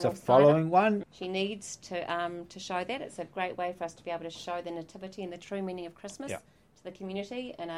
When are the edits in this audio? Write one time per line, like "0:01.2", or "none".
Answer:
0:01.0